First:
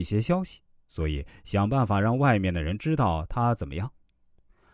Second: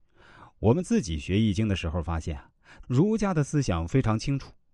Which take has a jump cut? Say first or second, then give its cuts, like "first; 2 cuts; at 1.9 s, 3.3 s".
second; 1 cut; at 2.8 s